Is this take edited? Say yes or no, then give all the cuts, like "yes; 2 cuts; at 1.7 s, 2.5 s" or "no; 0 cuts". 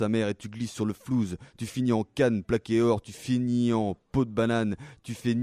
no; 0 cuts